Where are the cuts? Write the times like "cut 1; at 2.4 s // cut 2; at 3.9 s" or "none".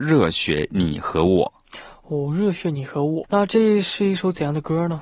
cut 1; at 3.2 s